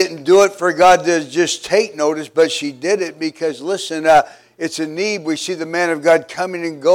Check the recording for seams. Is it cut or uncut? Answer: uncut